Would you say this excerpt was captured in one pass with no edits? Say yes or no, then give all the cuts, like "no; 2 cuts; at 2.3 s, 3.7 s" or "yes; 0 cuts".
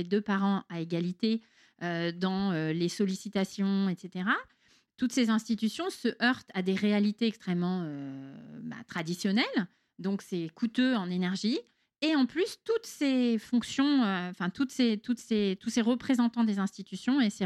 yes; 0 cuts